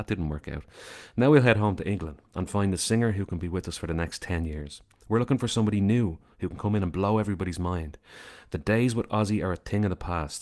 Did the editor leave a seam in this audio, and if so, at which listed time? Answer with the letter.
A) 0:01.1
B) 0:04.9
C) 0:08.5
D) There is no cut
D